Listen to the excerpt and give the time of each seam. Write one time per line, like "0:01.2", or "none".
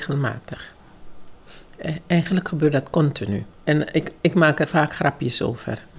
0:03.5